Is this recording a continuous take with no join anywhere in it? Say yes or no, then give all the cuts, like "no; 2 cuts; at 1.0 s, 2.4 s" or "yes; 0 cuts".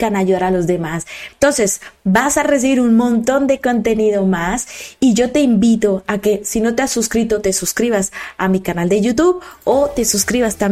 no; 1 cut; at 1.3 s